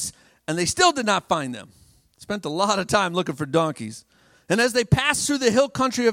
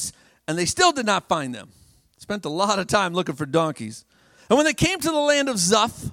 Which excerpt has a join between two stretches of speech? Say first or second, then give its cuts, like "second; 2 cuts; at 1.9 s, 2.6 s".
first; 1 cut; at 4.4 s